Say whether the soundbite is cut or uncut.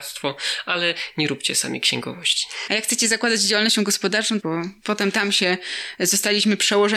cut